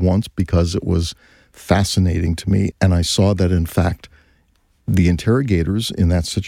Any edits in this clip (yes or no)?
yes